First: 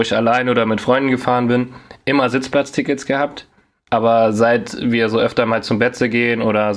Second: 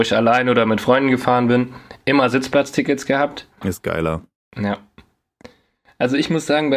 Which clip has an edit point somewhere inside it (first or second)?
second